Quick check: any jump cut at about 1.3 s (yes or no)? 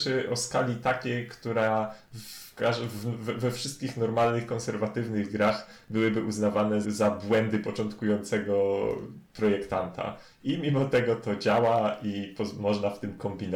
no